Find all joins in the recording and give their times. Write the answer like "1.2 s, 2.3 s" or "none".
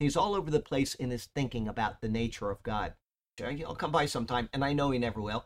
3.4 s